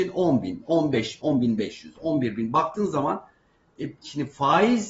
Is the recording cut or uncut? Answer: cut